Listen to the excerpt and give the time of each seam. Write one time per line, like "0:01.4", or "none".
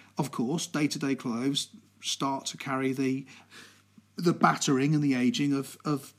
none